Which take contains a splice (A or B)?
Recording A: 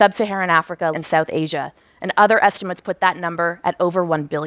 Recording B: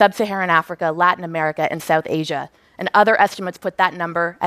A